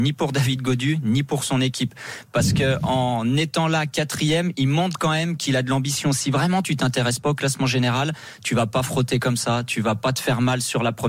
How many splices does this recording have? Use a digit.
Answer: 0